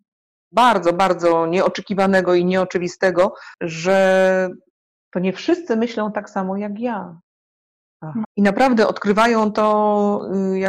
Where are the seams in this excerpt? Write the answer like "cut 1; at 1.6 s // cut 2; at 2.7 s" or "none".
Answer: cut 1; at 3.5 s // cut 2; at 8.2 s